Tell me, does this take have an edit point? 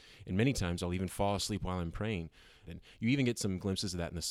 yes; 1 cut; at 2.7 s

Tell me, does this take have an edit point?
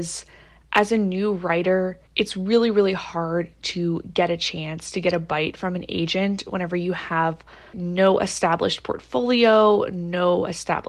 yes; 2 cuts; at 2.1 s, 7.7 s

